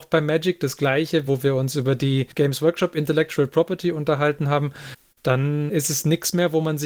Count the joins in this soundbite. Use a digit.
2